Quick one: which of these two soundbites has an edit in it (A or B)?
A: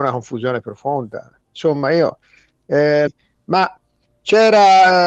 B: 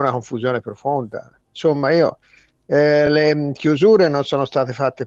A